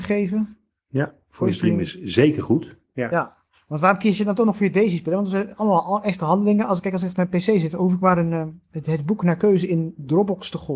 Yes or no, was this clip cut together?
no